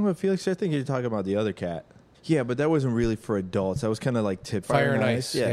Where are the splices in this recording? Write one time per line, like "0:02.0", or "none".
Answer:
0:02.1
0:04.6